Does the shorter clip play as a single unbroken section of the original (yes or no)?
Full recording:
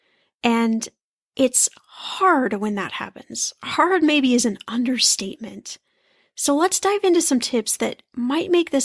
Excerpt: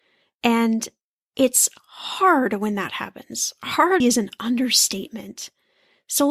no